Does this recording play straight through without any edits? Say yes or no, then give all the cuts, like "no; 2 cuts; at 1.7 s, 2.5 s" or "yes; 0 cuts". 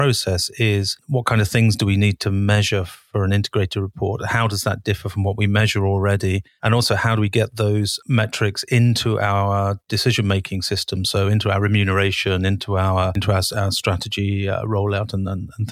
no; 1 cut; at 6.6 s